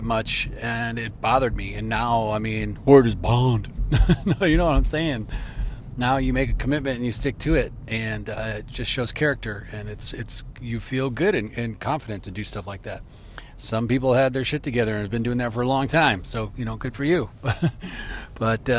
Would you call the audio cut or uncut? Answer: uncut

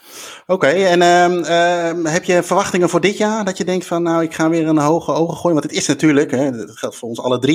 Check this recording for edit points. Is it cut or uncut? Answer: uncut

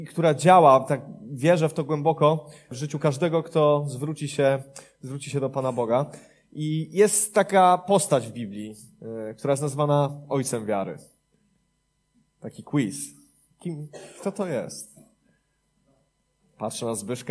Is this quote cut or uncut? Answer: uncut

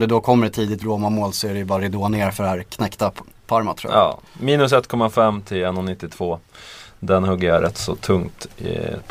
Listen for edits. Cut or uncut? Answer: uncut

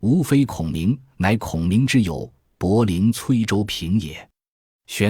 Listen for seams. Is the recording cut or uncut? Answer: uncut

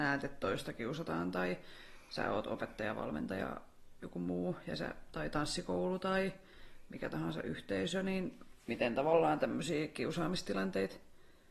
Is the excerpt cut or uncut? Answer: uncut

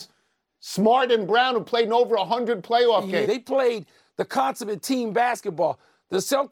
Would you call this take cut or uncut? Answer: cut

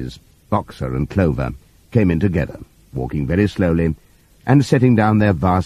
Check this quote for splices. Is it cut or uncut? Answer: uncut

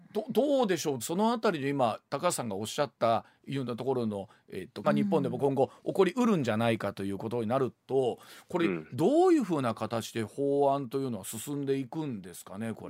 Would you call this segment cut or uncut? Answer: cut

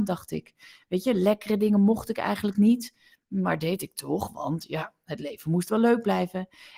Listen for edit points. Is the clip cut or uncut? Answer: uncut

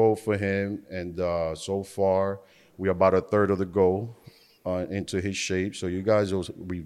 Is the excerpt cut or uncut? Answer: uncut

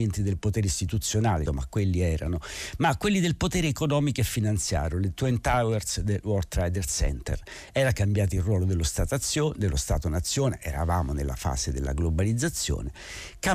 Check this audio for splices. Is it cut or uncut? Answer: cut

